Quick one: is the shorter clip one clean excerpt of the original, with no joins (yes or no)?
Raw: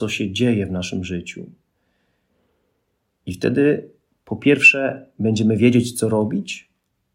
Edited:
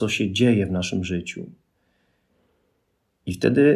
yes